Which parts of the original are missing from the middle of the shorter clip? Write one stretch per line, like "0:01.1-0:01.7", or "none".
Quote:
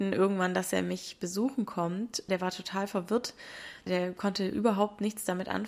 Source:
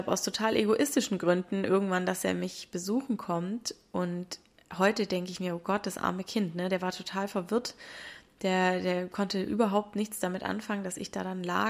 0:03.8-0:06.7
0:08.3-0:08.8